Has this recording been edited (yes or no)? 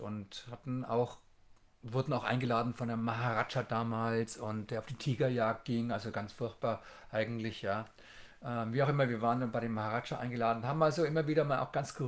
no